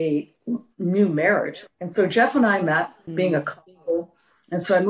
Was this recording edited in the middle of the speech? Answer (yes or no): yes